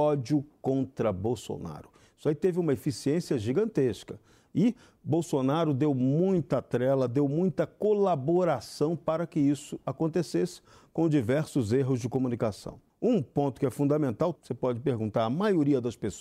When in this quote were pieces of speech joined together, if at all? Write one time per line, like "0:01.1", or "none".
0:12.9
0:14.4